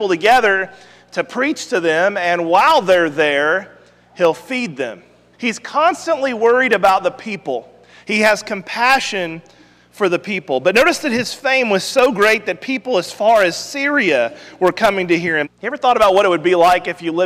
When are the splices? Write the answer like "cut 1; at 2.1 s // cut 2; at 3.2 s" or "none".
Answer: cut 1; at 5.3 s // cut 2; at 15.4 s

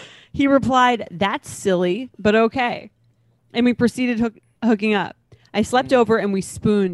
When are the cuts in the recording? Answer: cut 1; at 2.1 s

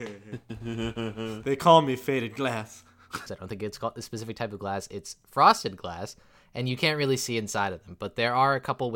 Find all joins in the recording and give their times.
cut 1; at 3.3 s

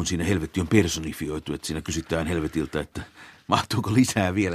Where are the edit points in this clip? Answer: none

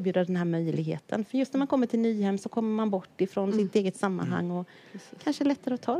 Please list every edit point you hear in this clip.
none

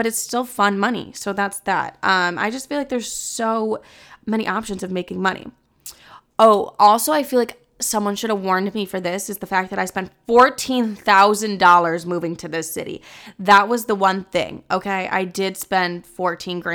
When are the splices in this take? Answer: none

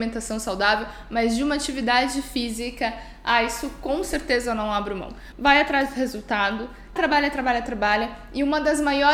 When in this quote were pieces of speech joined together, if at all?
cut 1; at 5.3 s // cut 2; at 7.0 s

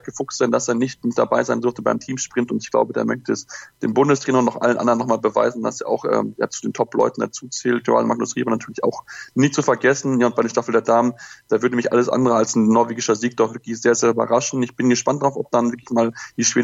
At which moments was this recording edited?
none

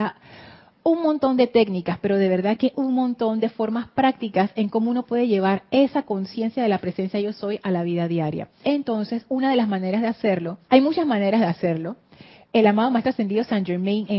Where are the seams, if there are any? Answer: cut 1; at 8.6 s // cut 2; at 10.6 s

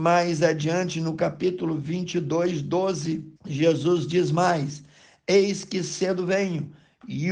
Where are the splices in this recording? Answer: cut 1; at 3.4 s

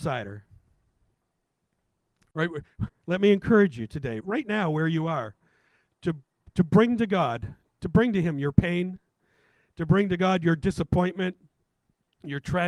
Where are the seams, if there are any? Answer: cut 1; at 2.9 s // cut 2; at 4.2 s

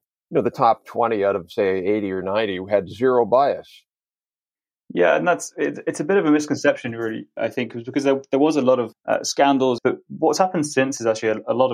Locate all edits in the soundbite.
cut 1; at 9.8 s

